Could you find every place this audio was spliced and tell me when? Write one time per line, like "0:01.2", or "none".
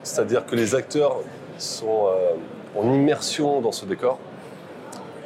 none